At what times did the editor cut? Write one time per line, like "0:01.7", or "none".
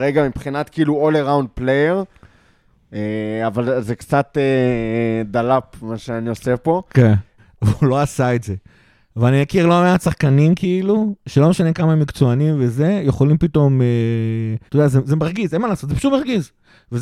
0:07.4
0:14.7